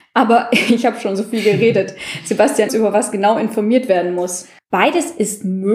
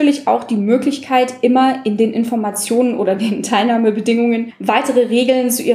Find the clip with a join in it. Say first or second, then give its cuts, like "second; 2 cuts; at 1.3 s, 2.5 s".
first; 2 cuts; at 2.7 s, 4.6 s